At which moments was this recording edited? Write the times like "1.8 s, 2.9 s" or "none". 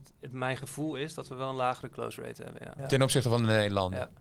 2.8 s